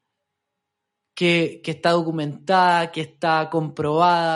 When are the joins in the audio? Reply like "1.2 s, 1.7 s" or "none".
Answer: 1.6 s

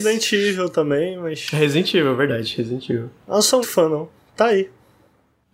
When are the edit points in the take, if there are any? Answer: 3.6 s

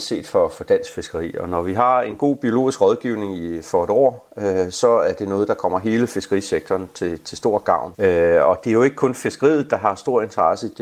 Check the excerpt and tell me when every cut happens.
7.9 s

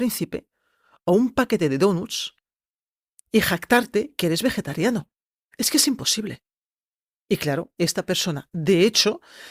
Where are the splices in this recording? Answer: none

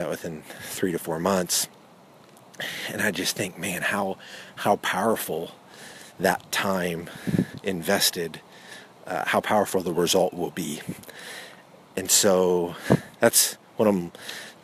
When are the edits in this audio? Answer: none

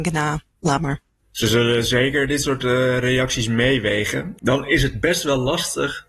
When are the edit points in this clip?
4.4 s

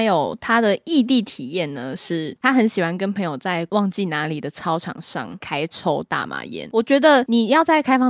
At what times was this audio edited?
none

